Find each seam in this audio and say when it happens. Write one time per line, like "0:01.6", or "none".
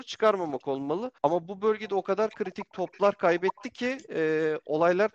0:01.2